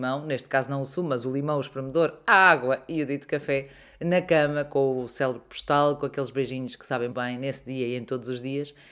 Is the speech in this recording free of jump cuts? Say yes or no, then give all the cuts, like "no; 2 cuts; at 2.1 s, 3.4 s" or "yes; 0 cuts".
no; 1 cut; at 7.1 s